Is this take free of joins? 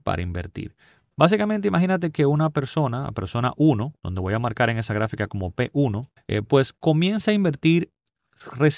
no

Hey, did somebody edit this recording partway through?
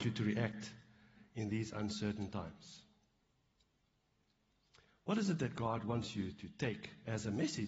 no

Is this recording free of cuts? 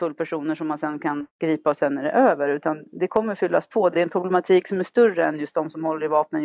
yes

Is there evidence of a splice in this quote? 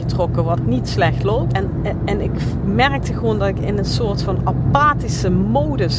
yes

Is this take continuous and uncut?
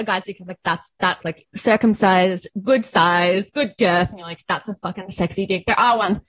no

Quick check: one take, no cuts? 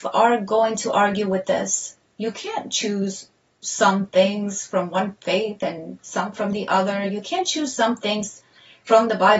yes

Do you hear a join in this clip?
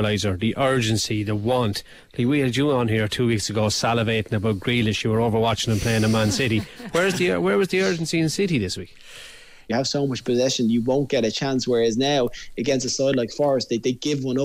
yes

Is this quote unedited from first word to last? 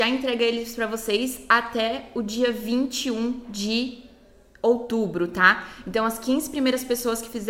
yes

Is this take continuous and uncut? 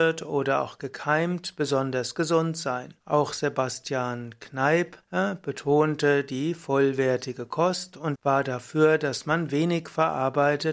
no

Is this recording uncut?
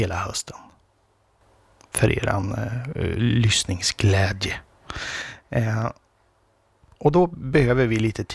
yes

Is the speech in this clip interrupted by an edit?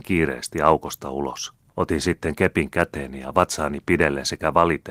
yes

